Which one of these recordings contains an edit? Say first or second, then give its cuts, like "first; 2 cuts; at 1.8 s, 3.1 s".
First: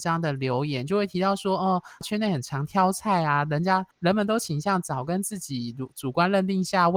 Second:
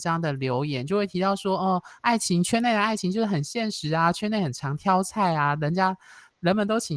first; 2 cuts; at 2.0 s, 3.9 s